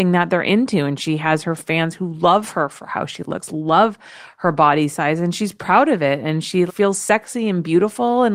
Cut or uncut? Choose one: cut